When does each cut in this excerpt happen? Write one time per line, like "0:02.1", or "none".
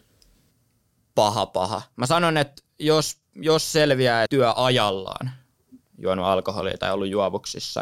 0:04.3